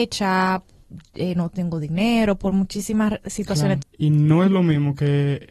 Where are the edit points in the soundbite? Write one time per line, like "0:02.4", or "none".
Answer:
0:03.8

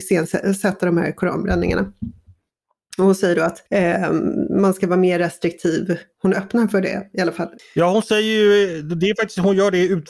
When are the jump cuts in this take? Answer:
0:03.7

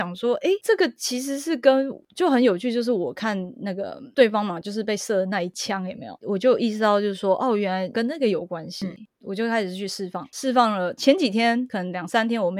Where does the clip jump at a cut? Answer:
none

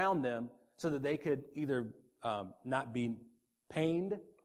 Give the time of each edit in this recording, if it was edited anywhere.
none

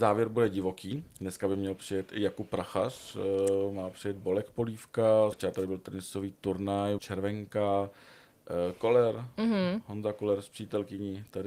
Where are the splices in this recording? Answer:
0:01.1
0:05.3
0:07.0

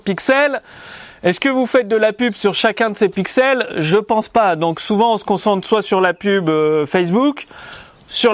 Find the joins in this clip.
none

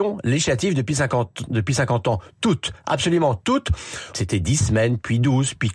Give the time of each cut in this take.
0:04.1

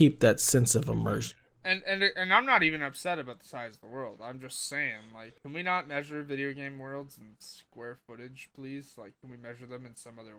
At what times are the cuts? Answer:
0:05.4

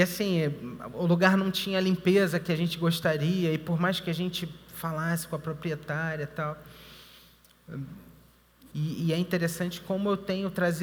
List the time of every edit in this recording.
0:08.7

